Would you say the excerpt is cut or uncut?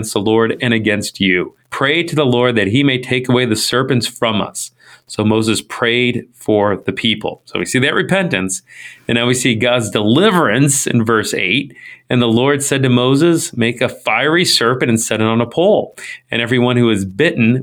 cut